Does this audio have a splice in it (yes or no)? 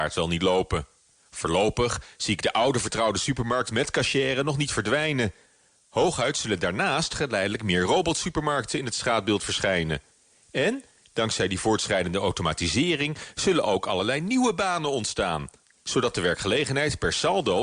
no